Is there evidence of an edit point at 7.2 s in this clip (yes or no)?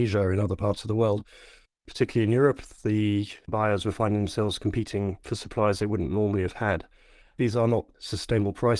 yes